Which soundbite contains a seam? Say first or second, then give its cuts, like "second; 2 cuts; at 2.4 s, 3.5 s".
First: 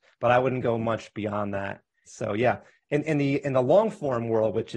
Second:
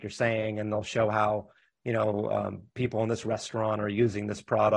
first; 1 cut; at 2.1 s